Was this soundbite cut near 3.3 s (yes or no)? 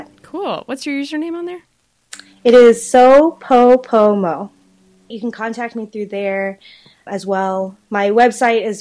no